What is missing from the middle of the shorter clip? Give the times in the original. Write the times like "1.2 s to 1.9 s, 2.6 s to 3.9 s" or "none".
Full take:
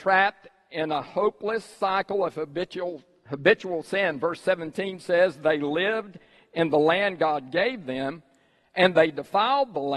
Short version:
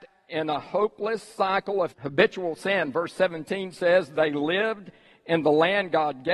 2.3 s to 3.2 s